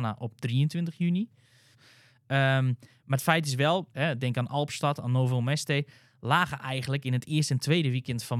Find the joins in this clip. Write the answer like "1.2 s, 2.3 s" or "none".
1.7 s, 3.9 s